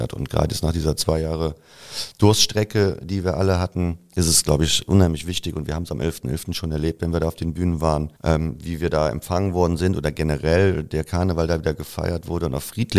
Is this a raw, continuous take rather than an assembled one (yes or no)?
no